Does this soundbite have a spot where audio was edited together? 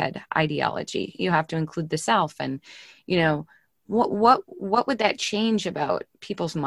no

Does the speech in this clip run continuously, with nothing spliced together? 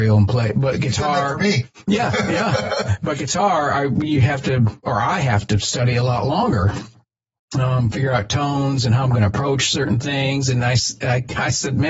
yes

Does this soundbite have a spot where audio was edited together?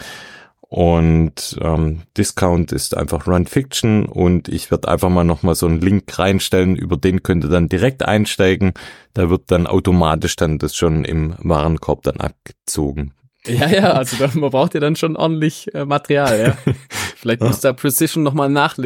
yes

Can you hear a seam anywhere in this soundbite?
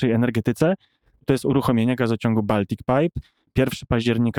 no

